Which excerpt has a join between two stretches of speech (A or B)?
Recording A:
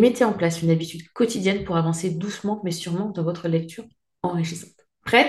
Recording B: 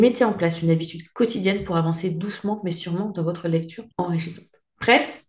B